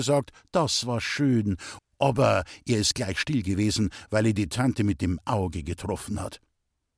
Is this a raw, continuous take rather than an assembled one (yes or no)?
no